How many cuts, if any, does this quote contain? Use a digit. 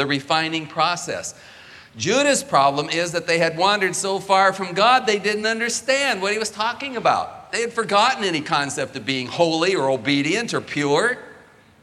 1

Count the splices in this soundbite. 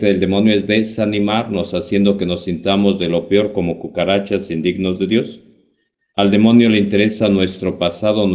0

